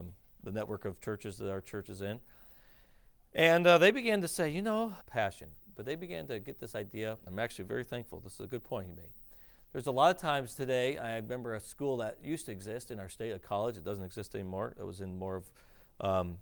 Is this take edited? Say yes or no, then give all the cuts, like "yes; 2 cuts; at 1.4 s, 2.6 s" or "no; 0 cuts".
yes; 2 cuts; at 5.0 s, 7.3 s